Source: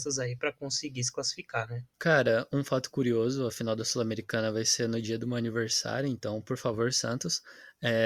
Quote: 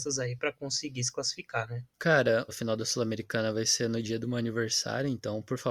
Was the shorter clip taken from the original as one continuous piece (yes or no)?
no